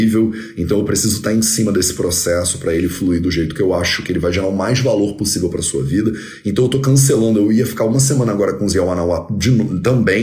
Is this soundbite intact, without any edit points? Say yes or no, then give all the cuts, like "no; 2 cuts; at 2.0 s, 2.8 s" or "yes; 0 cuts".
yes; 0 cuts